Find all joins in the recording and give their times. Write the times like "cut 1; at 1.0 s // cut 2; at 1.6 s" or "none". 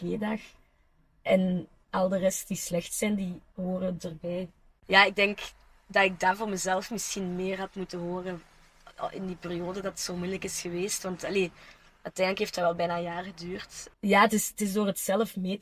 cut 1; at 13.9 s